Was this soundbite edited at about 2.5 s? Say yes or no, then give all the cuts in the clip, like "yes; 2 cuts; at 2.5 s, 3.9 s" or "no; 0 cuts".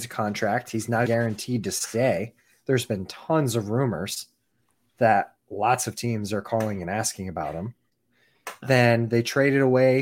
no; 2 cuts; at 1.1 s, 8.6 s